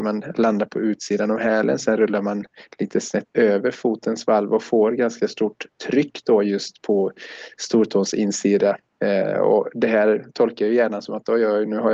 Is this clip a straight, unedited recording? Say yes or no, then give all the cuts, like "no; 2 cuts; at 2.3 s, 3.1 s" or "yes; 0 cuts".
yes; 0 cuts